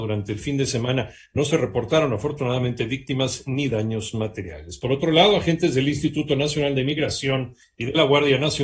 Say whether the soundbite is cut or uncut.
uncut